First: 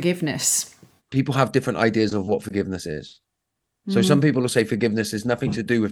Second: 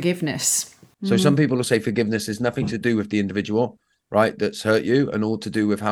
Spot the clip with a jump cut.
second; 1 cut; at 0.9 s

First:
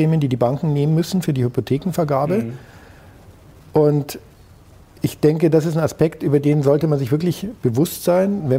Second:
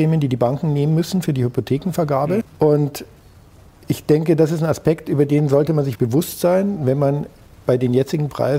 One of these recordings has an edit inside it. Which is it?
second; 2 cuts; at 2.4 s, 5.9 s

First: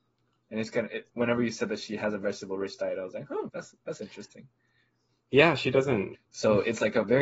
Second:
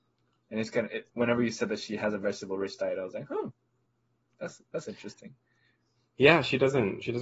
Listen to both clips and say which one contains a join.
first; 2 cuts; at 3.5 s, 6.1 s

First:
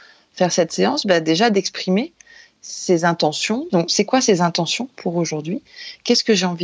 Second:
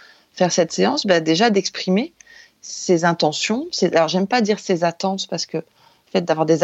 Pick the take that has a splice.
first; 1 cut; at 3.7 s

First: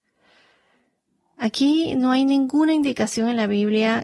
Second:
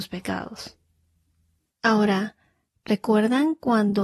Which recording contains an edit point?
second; 1 cut; at 1.7 s

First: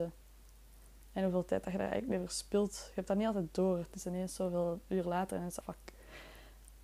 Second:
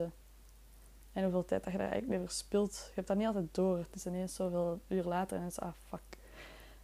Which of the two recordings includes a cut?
first; 1 cut; at 5.6 s

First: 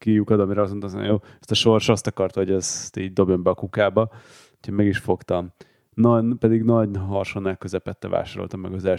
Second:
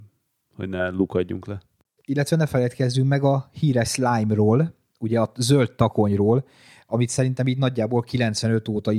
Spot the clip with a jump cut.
second; 1 cut; at 2.0 s

